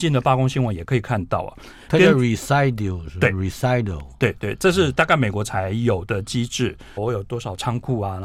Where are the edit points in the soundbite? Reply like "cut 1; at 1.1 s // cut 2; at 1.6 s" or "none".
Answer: cut 1; at 7.0 s